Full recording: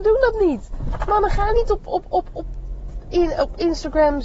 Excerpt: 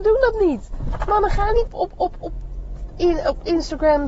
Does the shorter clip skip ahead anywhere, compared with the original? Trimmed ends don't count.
yes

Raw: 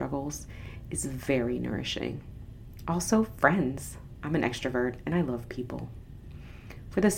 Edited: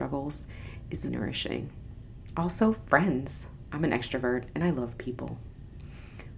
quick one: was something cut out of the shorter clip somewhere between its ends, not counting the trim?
yes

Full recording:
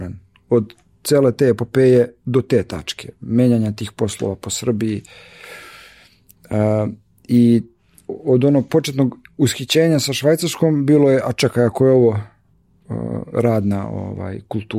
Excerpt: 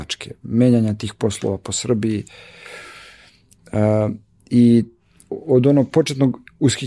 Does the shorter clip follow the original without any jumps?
yes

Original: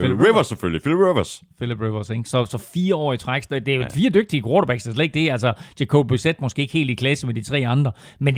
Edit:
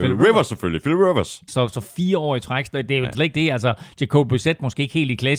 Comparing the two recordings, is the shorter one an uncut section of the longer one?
no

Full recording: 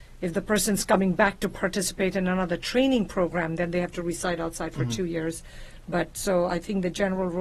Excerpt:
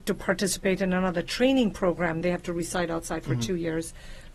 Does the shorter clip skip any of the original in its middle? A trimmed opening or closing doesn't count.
yes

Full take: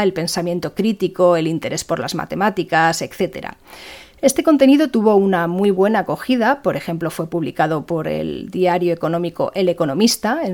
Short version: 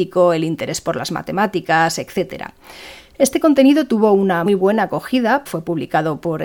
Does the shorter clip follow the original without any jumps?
no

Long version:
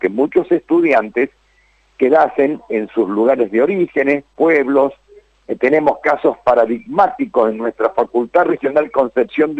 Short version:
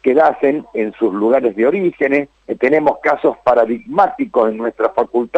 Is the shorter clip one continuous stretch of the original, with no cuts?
no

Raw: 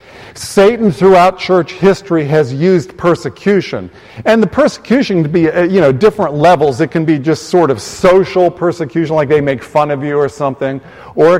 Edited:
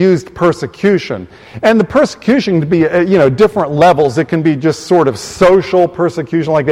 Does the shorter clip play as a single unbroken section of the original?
yes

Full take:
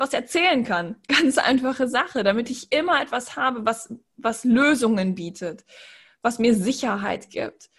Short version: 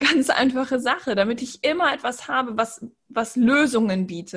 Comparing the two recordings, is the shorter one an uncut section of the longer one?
yes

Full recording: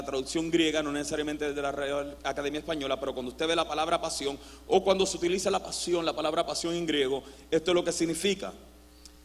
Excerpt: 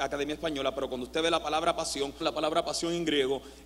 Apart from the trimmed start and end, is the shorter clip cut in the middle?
yes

